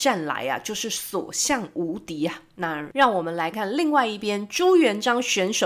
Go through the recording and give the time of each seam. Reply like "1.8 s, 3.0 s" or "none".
3.5 s

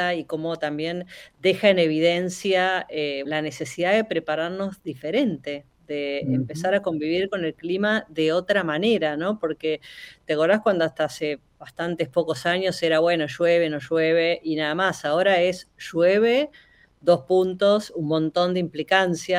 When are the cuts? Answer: 3.2 s

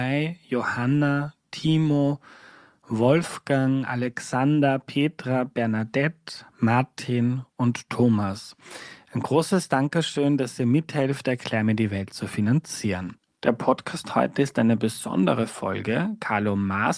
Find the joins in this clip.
none

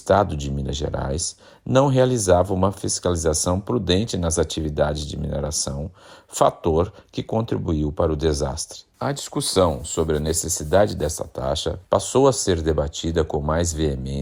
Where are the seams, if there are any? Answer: 8.9 s

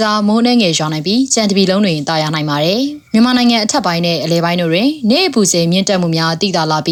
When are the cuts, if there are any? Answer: 3.1 s

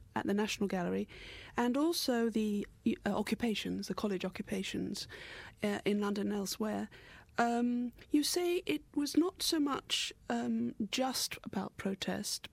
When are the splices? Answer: none

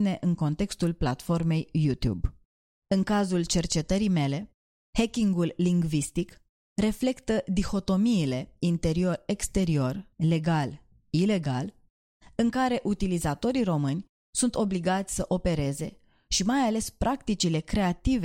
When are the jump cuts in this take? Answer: 10.1 s

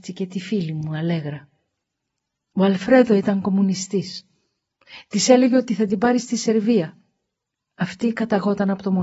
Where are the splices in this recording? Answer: none

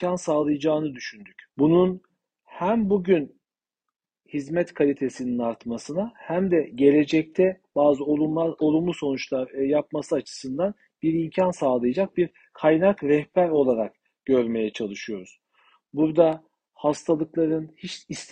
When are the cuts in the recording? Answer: 1.5 s

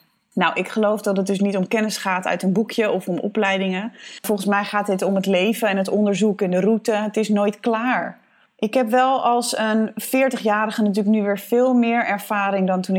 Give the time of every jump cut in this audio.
none

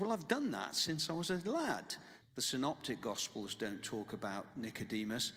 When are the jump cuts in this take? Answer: 2.2 s

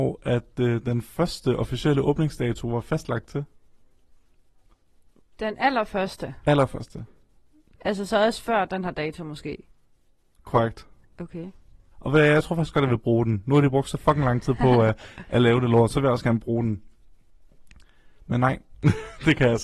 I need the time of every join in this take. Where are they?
11.9 s

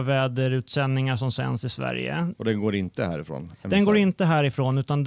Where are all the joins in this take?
2.3 s

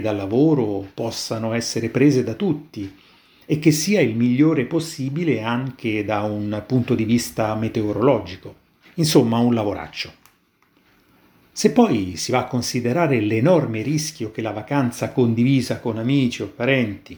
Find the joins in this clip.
8.9 s

